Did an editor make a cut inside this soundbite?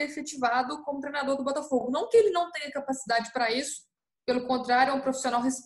no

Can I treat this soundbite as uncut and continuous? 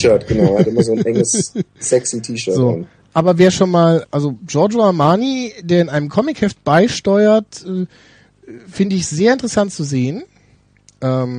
no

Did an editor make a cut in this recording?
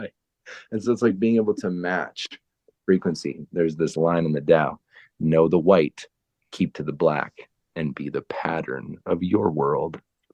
no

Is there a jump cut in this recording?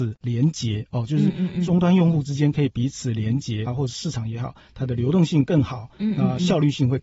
yes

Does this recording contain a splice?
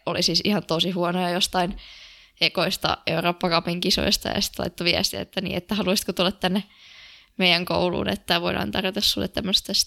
no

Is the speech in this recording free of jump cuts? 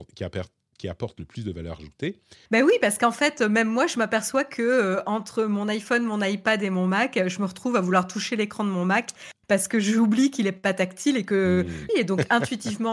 no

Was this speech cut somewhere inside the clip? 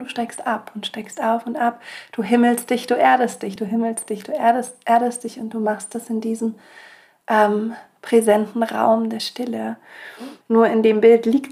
yes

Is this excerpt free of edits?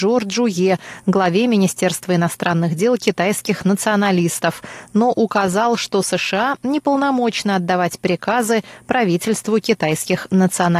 yes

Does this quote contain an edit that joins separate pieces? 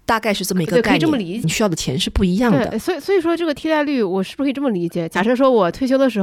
yes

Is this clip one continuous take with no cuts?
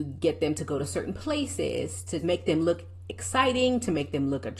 no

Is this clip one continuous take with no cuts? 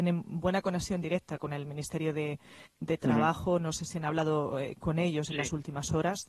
yes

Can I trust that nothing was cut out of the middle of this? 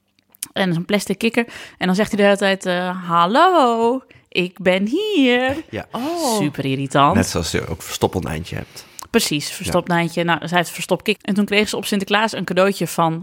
no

